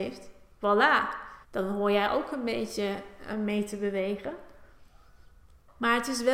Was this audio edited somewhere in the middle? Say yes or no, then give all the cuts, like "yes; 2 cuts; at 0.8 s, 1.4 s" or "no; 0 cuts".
yes; 1 cut; at 1.4 s